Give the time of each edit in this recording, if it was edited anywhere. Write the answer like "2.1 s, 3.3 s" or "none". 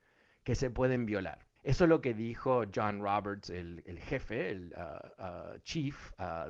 1.6 s